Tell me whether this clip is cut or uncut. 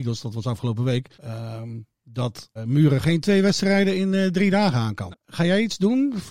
cut